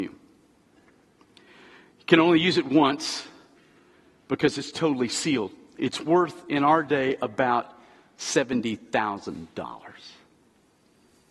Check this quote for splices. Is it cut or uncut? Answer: uncut